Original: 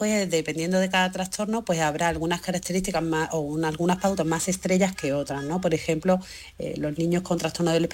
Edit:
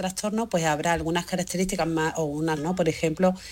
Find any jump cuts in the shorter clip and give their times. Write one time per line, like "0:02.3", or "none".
0:02.6